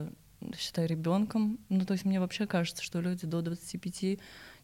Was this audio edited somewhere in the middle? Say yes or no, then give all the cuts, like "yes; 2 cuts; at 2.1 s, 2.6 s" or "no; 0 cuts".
no; 0 cuts